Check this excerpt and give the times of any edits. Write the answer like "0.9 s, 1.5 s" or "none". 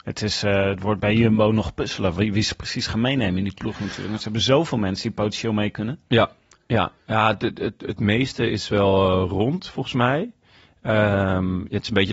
none